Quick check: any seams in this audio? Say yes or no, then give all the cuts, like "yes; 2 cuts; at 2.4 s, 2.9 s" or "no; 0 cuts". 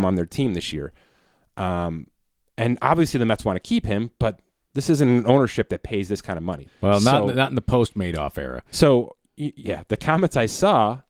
yes; 2 cuts; at 6.7 s, 9.6 s